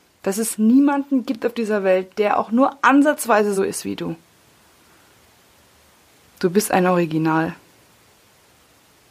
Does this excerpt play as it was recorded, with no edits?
no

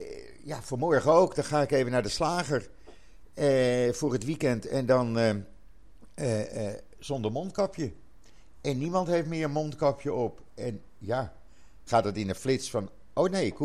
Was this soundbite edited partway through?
yes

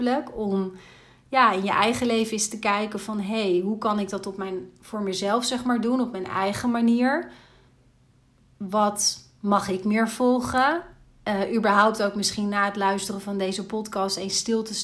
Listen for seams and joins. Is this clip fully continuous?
yes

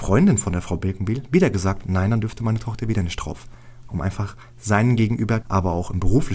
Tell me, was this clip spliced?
yes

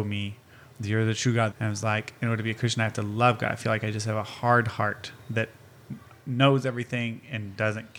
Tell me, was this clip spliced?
yes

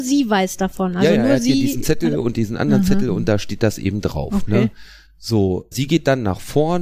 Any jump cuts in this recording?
yes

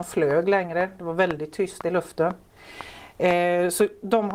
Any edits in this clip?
no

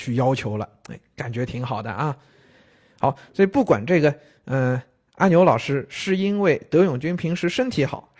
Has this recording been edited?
no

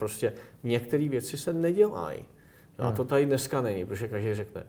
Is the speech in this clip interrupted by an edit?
no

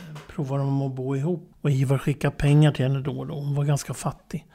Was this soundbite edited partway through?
yes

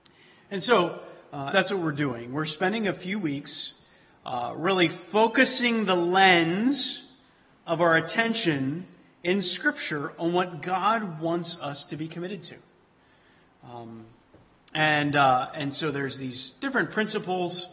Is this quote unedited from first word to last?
no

